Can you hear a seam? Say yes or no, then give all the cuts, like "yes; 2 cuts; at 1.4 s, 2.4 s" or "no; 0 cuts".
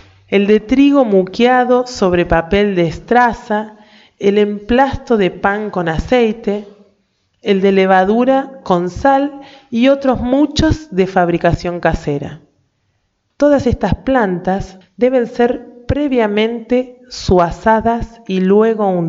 yes; 2 cuts; at 13.3 s, 14.8 s